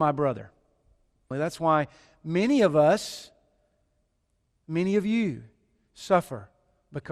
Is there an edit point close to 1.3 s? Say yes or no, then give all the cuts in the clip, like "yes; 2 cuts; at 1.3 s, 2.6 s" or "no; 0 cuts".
yes; 1 cut; at 1.3 s